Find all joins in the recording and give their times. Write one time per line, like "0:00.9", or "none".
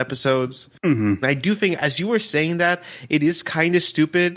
0:01.2